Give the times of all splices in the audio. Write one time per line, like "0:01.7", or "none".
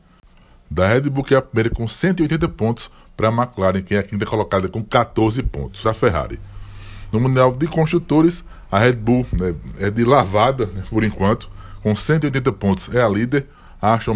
0:05.8